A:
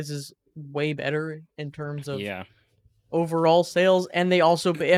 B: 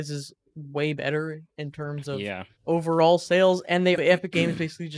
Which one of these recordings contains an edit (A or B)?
B